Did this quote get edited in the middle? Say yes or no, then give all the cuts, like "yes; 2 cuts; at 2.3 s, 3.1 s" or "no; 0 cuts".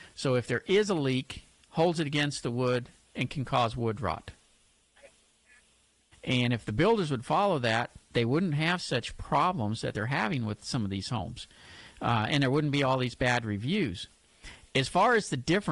yes; 2 cuts; at 1.6 s, 6.1 s